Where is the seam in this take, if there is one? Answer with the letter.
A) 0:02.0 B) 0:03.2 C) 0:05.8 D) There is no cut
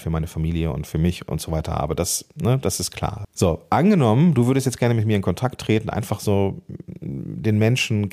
B